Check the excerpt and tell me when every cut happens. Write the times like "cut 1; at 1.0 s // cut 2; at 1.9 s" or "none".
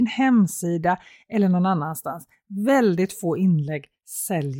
none